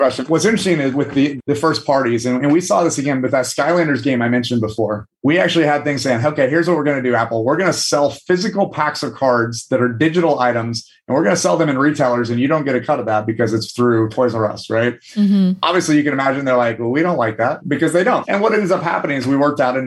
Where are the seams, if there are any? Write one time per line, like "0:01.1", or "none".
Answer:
none